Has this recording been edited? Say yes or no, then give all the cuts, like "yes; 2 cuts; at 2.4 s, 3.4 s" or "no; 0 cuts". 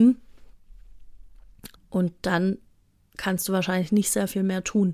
yes; 1 cut; at 1.7 s